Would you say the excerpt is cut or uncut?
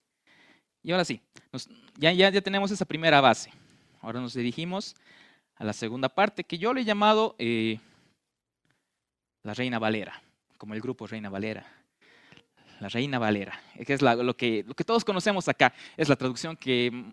uncut